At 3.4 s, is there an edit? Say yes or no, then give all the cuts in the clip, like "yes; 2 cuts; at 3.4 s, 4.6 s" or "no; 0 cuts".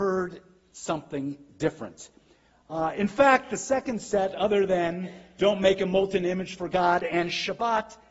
no; 0 cuts